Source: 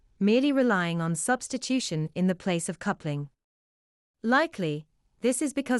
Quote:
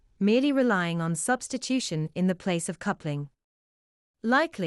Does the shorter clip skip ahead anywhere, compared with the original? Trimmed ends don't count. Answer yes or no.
no